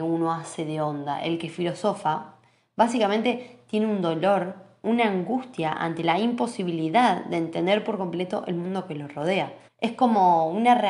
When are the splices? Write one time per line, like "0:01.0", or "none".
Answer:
0:09.7